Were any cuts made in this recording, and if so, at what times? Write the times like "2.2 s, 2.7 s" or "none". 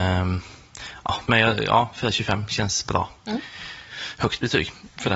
1.3 s